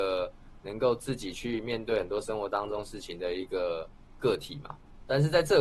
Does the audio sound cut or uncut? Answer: uncut